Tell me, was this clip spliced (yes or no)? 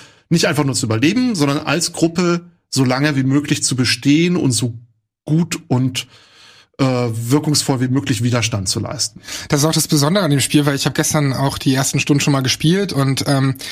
no